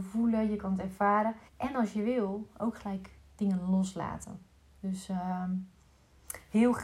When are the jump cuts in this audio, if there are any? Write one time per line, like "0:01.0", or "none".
0:01.5